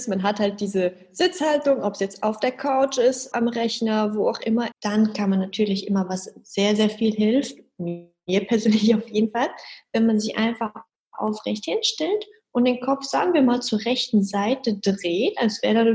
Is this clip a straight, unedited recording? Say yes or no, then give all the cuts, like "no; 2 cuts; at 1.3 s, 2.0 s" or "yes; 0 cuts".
no; 2 cuts; at 3.3 s, 4.7 s